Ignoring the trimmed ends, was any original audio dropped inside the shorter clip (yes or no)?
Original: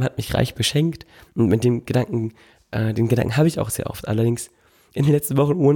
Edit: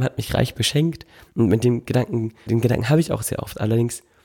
yes